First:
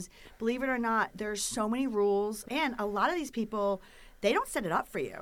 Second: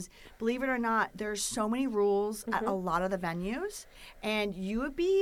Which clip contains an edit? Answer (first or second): first